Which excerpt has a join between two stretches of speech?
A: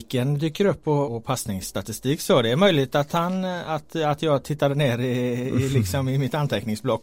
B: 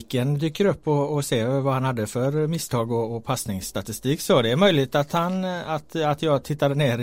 A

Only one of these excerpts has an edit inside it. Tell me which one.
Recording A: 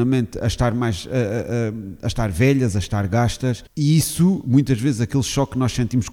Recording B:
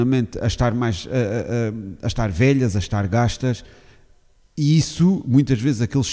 A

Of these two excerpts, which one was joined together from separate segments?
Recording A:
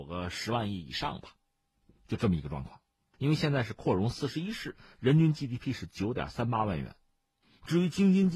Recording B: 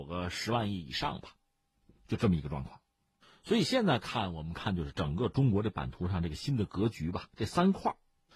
A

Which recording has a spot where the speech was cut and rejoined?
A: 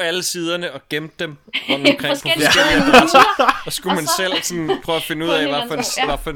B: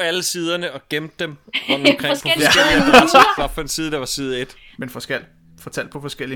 B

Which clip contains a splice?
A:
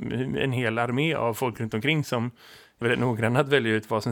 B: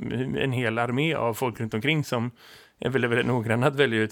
A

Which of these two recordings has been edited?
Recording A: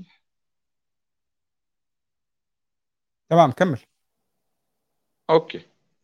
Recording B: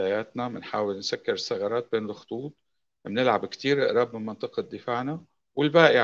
A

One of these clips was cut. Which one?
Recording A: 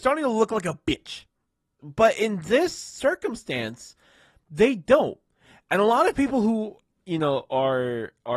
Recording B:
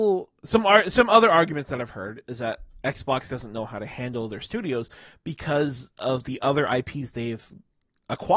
A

